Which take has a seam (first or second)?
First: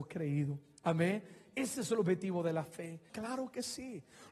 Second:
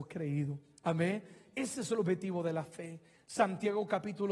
first